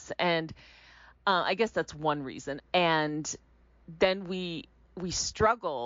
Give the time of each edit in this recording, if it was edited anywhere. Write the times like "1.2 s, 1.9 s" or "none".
2.6 s